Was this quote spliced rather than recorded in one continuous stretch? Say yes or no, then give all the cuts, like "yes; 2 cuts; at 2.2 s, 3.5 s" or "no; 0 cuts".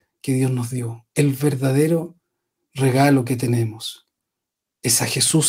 no; 0 cuts